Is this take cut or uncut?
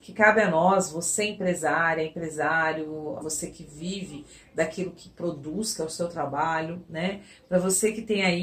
cut